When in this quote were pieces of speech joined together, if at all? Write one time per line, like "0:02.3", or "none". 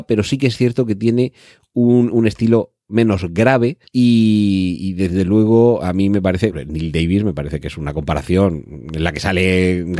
0:03.9
0:06.5